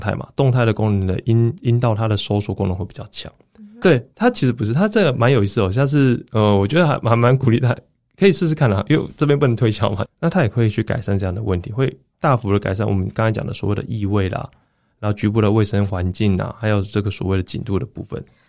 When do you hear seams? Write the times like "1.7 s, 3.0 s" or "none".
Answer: 3.8 s, 10.1 s